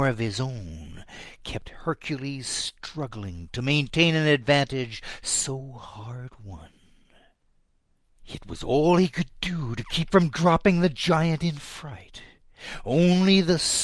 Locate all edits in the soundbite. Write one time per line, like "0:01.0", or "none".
0:08.1